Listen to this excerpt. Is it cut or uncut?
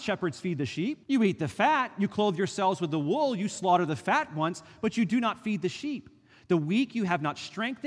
cut